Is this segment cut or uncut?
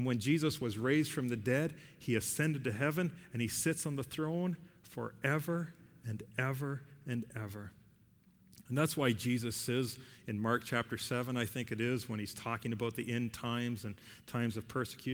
uncut